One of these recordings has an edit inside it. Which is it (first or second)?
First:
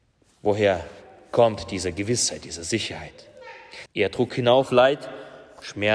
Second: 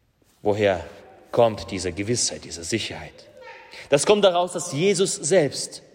first